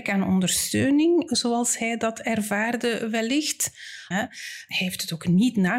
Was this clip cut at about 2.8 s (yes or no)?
no